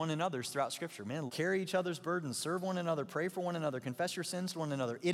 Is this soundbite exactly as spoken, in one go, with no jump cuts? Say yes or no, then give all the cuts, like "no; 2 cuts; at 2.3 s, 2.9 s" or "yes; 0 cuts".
no; 1 cut; at 1.3 s